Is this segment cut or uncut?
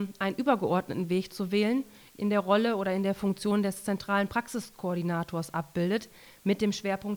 cut